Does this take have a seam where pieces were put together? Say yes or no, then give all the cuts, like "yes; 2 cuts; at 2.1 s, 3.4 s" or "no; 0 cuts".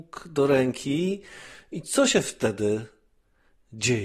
no; 0 cuts